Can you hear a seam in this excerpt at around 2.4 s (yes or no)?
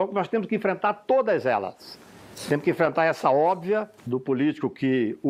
no